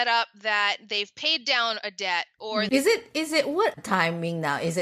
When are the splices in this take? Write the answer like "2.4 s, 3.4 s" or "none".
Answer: 2.7 s, 3.7 s

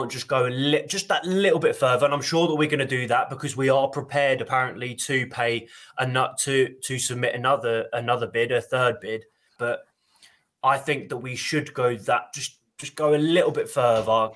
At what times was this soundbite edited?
9.6 s

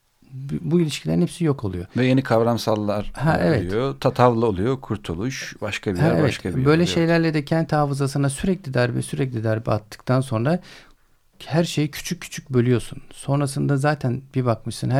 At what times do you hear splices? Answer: none

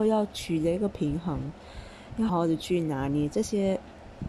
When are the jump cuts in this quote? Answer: 2.3 s

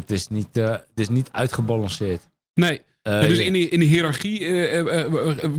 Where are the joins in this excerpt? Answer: none

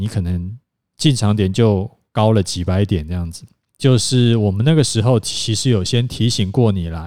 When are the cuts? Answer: 3.7 s

